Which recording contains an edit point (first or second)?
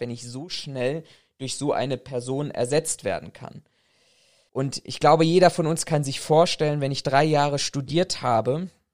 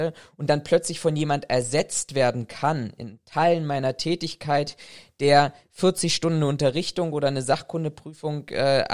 first